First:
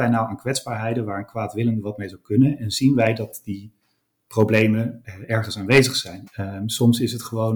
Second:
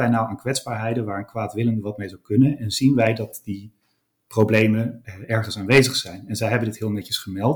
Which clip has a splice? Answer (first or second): first